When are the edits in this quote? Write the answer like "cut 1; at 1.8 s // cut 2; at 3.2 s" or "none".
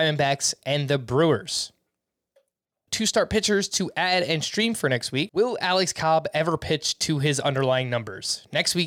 cut 1; at 2.9 s // cut 2; at 5.3 s

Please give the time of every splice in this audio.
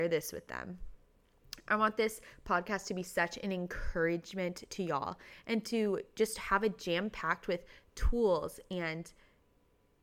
none

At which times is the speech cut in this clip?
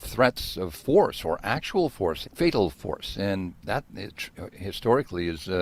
cut 1; at 2.2 s

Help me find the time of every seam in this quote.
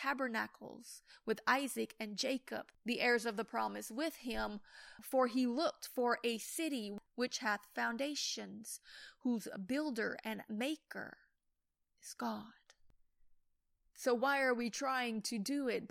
cut 1; at 13.9 s

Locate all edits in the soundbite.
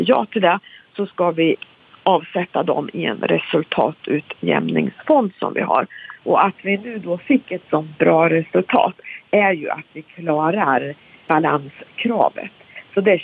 cut 1; at 6.2 s

